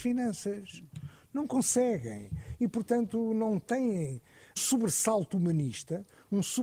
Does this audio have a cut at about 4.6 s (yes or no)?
yes